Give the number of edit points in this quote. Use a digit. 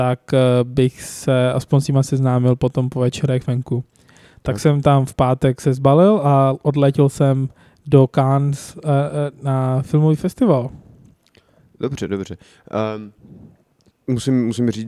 0